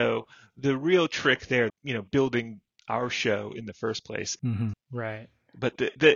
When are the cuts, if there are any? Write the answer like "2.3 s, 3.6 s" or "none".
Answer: 1.7 s, 4.7 s